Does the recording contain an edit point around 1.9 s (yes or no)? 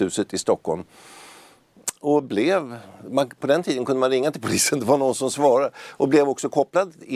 no